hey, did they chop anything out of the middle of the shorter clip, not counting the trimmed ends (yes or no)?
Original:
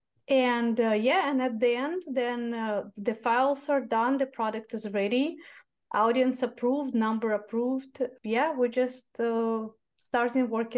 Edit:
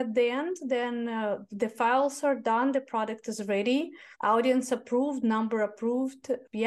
yes